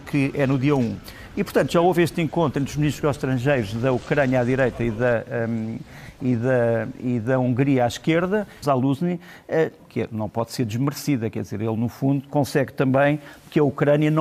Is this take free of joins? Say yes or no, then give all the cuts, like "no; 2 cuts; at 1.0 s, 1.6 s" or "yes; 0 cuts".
no; 2 cuts; at 8.6 s, 9.8 s